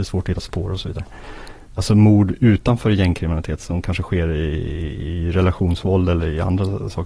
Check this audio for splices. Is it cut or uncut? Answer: cut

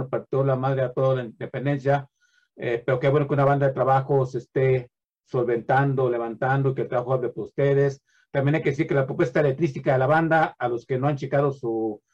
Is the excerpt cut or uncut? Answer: uncut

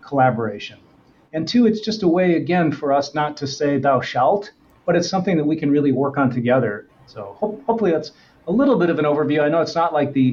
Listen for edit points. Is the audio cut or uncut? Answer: cut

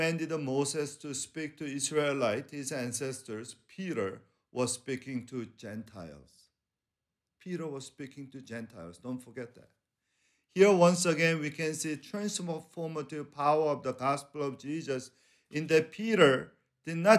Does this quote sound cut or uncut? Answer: uncut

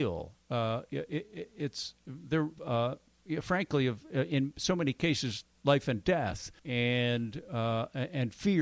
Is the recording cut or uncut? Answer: cut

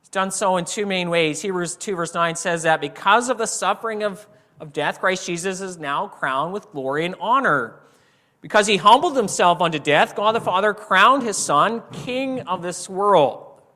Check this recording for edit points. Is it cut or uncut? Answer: uncut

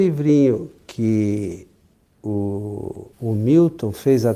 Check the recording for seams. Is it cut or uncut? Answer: cut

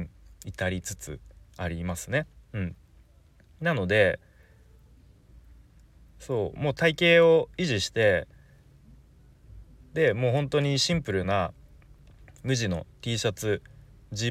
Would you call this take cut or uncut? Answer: uncut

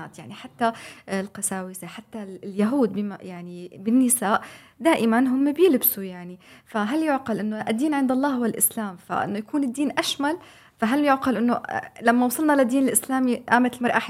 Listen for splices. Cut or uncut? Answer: uncut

